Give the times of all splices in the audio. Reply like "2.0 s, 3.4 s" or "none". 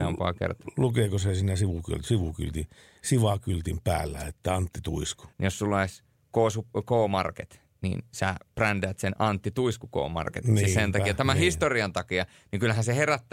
5.3 s